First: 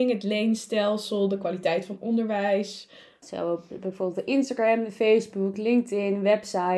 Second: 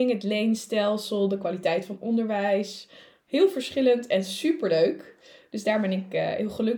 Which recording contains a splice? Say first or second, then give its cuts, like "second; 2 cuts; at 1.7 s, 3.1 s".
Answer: first; 1 cut; at 3.2 s